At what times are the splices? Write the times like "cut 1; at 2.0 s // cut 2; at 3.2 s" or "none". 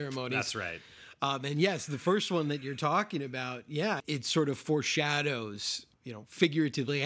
cut 1; at 4.0 s